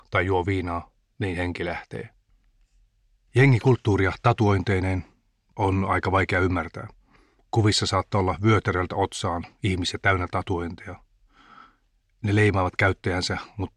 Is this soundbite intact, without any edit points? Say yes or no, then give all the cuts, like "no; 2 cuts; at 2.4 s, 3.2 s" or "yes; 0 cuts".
yes; 0 cuts